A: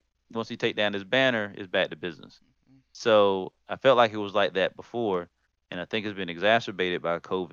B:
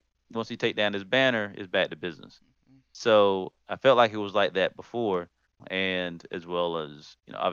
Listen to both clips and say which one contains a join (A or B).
B